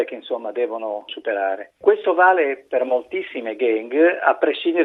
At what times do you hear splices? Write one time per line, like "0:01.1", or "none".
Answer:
none